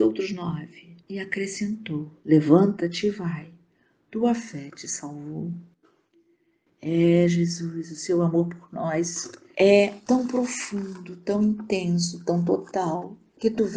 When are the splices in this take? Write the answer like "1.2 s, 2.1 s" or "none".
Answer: 1.1 s

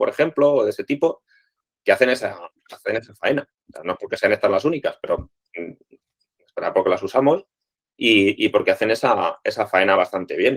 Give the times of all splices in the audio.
none

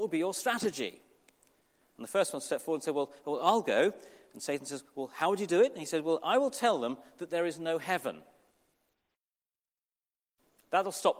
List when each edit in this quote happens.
none

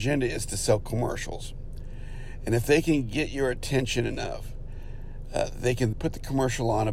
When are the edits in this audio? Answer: 5.9 s

